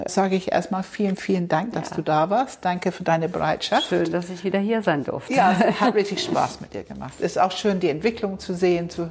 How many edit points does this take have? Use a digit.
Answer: 1